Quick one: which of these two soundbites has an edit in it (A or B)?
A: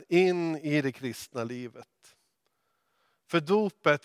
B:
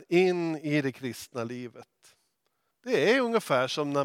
B